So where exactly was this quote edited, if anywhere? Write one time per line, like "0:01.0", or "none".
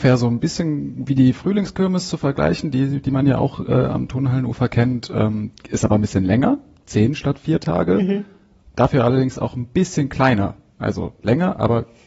none